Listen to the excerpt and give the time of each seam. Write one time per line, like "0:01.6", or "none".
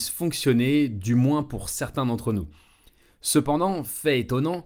none

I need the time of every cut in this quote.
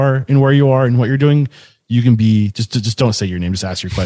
none

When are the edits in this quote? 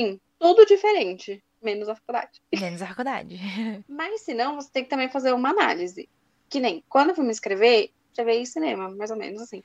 0:03.8
0:08.1

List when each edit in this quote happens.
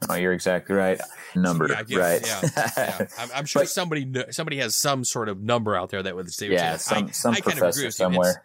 0:01.4

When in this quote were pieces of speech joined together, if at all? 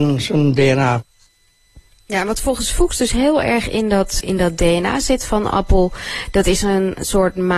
0:04.2

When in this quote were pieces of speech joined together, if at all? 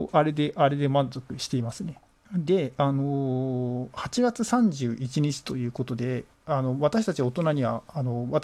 0:02.2

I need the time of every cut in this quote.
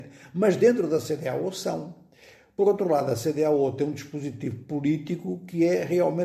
none

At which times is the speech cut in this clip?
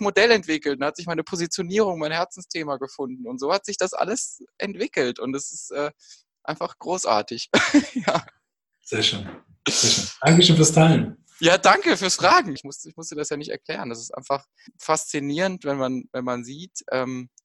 0:12.6
0:14.7

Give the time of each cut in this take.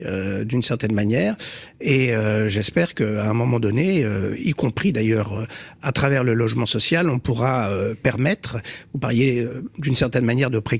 none

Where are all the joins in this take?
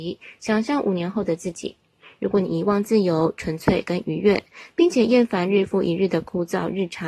none

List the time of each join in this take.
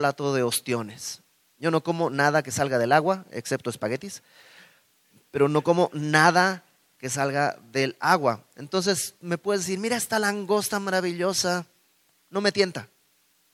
none

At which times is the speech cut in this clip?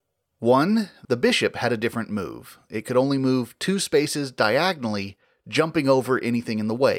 none

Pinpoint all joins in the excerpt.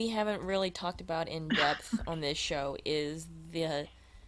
none

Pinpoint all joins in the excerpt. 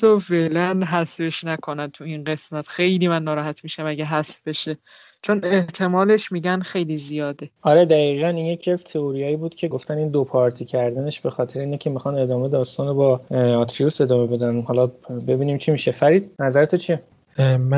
0:09.7

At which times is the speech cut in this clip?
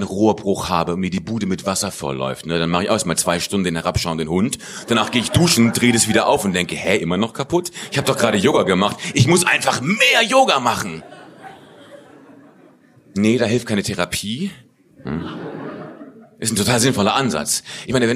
0:14.9

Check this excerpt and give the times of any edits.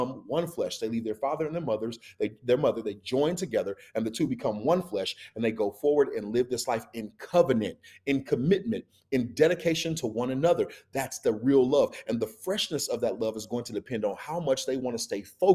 none

